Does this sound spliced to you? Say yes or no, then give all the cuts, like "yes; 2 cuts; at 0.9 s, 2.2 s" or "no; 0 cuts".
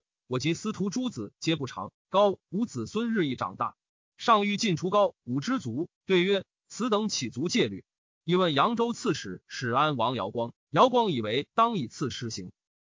yes; 1 cut; at 5.9 s